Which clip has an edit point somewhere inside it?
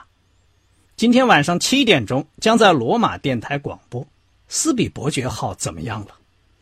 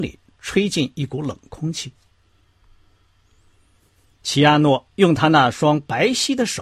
first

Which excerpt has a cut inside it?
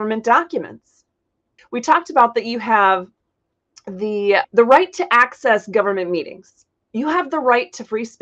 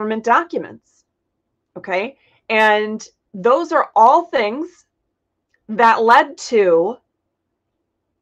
first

